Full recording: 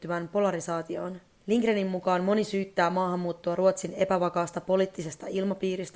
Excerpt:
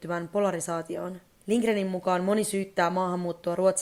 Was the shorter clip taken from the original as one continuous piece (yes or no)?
yes